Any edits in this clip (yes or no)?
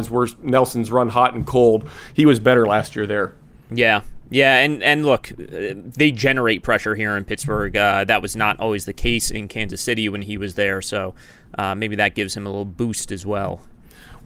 no